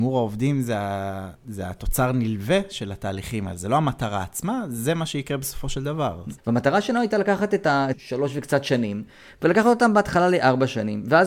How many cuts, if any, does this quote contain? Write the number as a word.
three